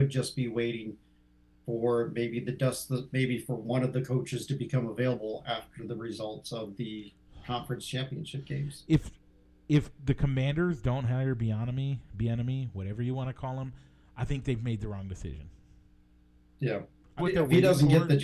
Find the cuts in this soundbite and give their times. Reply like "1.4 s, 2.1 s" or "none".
17.2 s